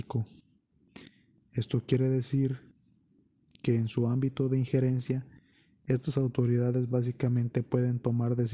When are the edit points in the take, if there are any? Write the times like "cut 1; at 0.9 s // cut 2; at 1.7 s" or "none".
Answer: none